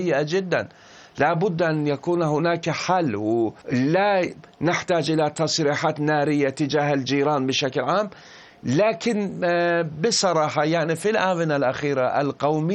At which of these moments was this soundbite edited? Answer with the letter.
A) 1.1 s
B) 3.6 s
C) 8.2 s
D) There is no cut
B